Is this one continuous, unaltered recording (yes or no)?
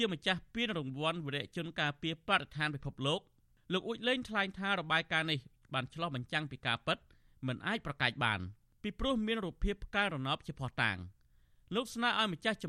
yes